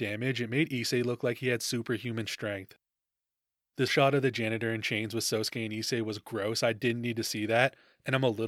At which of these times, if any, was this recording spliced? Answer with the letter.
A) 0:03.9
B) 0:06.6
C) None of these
A